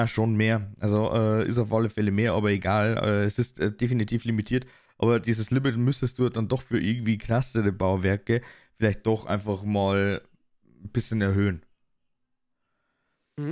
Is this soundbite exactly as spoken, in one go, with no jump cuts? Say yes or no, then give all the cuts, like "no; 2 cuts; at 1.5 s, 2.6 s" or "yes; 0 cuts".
yes; 0 cuts